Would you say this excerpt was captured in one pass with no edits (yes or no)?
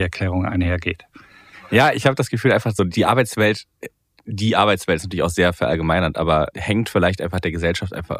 yes